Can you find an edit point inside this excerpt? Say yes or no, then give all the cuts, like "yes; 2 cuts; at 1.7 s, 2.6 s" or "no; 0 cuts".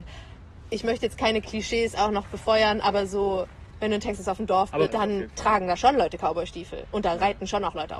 yes; 1 cut; at 4.9 s